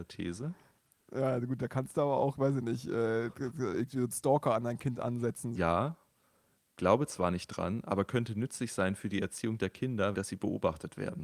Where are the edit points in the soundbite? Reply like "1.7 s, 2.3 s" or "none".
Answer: 5.6 s, 10.1 s